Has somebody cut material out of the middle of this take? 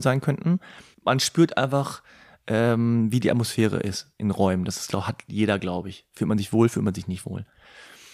no; 0 cuts

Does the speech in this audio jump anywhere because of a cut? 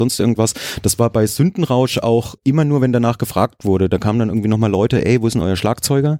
yes; 1 cut; at 2.4 s

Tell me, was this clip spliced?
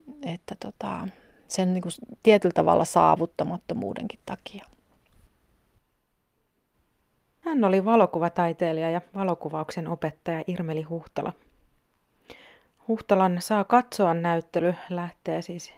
no; 0 cuts

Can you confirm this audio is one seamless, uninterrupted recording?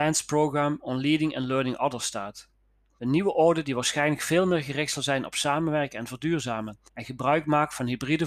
no; 2 cuts; at 3.0 s, 6.9 s

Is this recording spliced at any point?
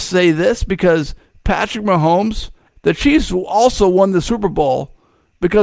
yes; 1 cut; at 2.7 s

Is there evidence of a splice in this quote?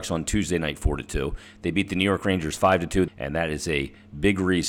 yes; 1 cut; at 3.1 s

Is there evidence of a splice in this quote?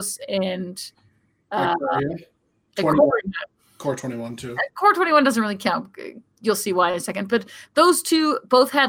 no; 0 cuts

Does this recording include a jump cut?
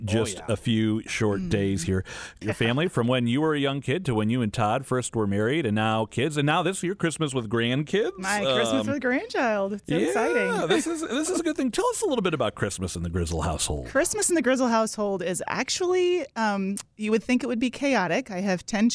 yes; 1 cut; at 2.4 s

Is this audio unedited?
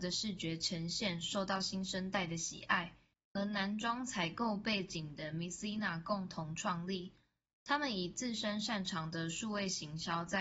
no; 1 cut; at 3.1 s

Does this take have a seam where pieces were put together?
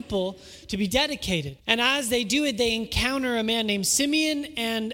yes; 1 cut; at 1.6 s

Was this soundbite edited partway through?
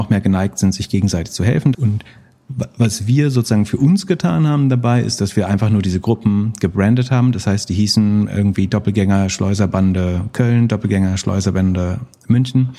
yes; 1 cut; at 1.7 s

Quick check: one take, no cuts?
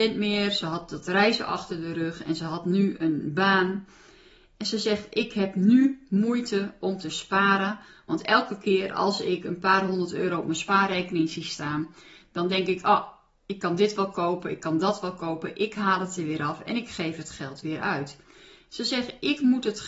yes; 0 cuts

